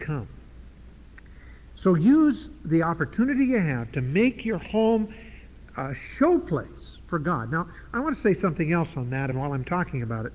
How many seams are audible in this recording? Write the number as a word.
one